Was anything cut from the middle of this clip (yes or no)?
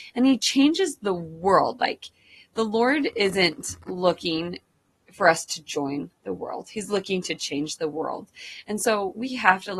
no